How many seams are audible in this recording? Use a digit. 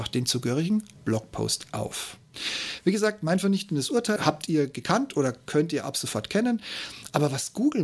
1